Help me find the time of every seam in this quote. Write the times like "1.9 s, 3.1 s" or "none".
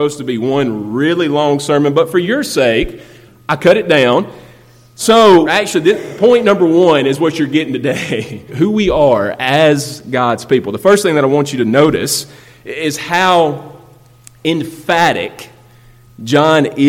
5.4 s, 8.5 s